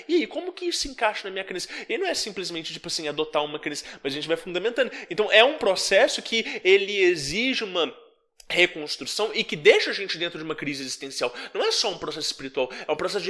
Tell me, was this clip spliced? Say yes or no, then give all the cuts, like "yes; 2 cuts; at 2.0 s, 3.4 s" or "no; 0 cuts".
no; 0 cuts